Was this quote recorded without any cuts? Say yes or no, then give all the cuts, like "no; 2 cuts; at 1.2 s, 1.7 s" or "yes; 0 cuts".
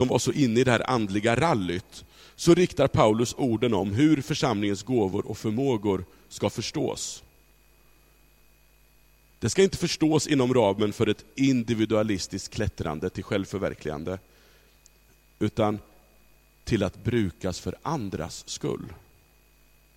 yes; 0 cuts